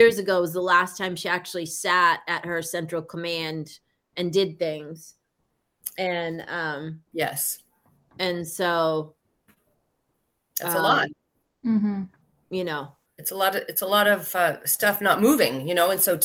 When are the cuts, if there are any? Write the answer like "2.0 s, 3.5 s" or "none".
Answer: none